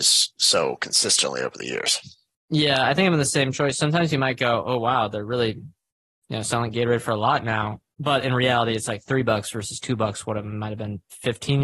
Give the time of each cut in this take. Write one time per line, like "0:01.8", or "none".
none